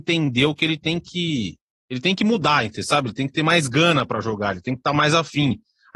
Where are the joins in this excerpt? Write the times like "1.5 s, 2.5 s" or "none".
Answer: none